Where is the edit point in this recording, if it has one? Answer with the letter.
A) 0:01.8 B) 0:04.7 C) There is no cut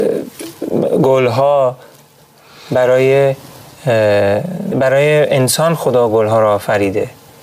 B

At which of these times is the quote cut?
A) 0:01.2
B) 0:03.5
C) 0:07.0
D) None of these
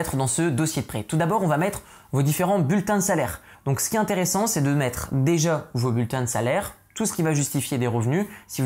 B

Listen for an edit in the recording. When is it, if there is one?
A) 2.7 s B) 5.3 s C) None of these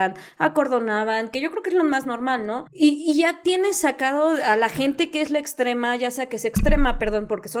A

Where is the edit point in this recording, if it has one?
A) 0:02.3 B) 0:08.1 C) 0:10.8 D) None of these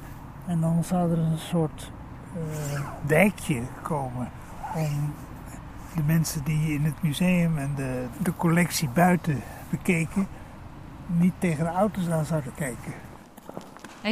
B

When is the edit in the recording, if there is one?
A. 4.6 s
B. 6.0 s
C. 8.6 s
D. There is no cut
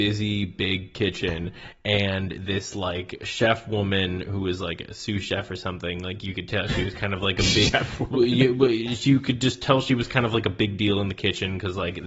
D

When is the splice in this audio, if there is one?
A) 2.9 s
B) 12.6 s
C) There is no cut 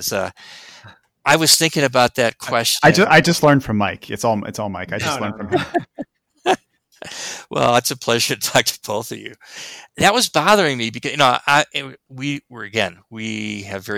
C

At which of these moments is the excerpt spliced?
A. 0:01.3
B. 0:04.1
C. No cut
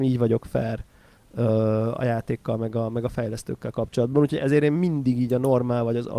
C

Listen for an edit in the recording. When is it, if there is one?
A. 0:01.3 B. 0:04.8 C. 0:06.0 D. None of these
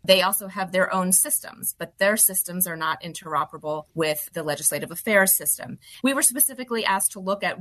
C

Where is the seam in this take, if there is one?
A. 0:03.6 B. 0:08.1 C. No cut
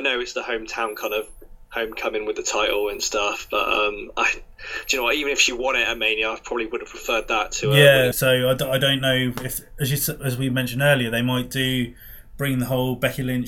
B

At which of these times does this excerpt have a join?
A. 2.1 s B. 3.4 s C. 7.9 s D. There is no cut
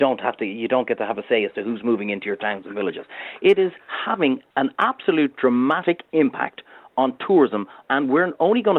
C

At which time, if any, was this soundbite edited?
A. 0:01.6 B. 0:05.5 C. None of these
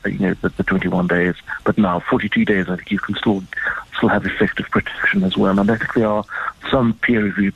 C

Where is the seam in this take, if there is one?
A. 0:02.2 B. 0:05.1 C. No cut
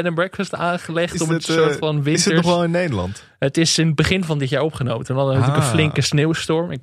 C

